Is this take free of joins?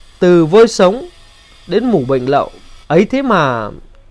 no; 1 cut; at 2.8 s

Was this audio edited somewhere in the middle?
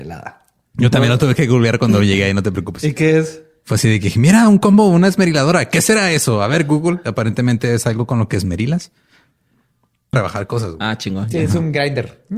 yes; 1 cut; at 10.1 s

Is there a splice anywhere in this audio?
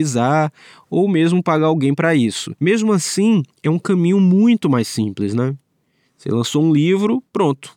no; 0 cuts

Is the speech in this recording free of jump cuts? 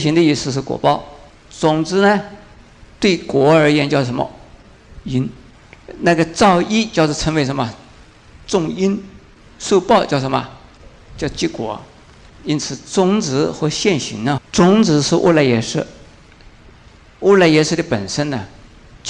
no; 3 cuts; at 1.3 s, 8.4 s, 14.4 s

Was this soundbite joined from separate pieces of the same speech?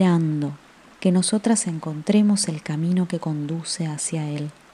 yes; 1 cut; at 1.0 s

